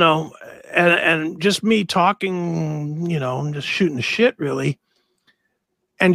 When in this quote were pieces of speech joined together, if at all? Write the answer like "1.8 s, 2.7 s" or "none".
none